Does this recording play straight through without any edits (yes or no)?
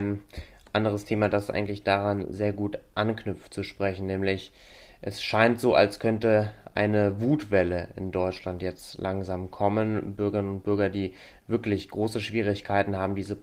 yes